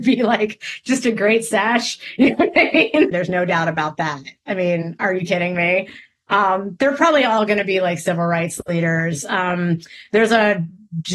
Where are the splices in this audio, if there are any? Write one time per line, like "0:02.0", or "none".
0:03.1